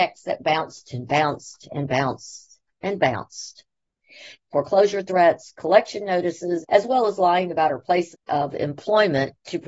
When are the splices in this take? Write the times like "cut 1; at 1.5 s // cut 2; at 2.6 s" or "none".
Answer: cut 1; at 4.4 s // cut 2; at 6.6 s // cut 3; at 8.1 s